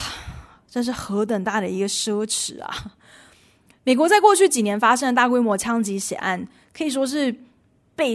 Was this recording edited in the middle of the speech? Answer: no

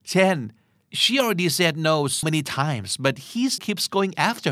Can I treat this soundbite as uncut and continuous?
no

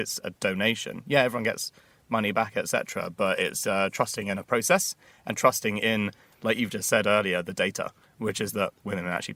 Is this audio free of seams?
yes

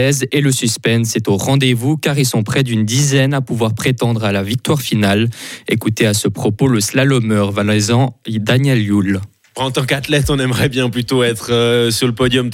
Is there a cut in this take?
no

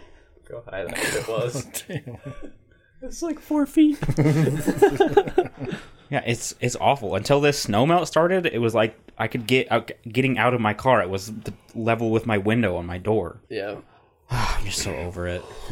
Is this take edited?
yes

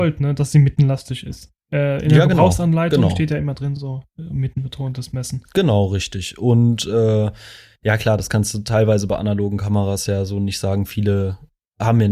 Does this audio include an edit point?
no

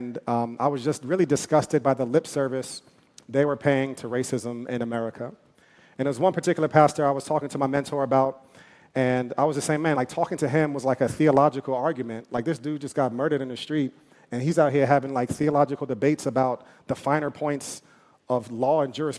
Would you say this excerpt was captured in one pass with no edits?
yes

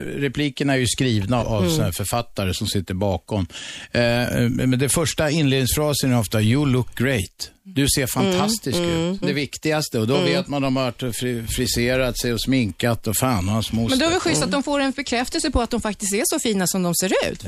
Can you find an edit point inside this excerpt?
yes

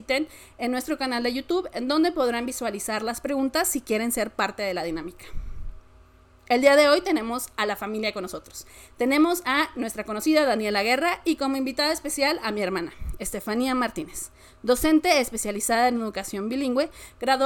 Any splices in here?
no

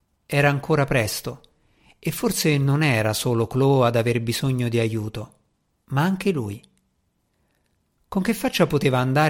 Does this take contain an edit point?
no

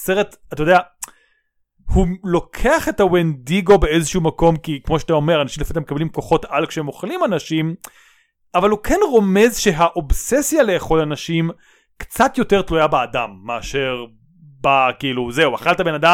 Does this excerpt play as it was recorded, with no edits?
yes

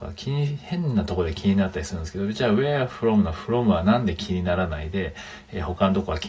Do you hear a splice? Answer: no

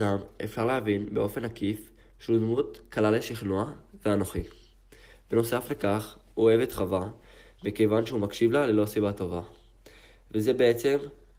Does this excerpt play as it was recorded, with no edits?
yes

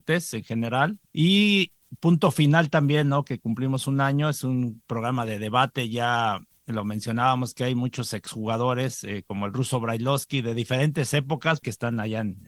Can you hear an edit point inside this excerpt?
no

